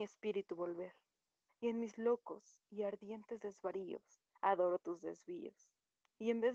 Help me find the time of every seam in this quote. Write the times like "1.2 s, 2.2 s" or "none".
1.5 s, 4.3 s